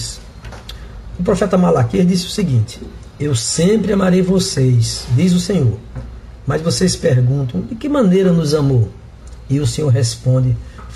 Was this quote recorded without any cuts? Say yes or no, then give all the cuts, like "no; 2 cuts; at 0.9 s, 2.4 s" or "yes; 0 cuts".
yes; 0 cuts